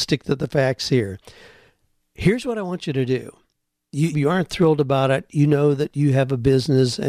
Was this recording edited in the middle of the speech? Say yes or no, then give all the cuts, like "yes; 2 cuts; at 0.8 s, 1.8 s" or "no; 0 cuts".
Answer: yes; 1 cut; at 4.1 s